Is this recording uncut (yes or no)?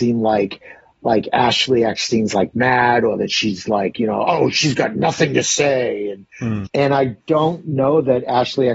no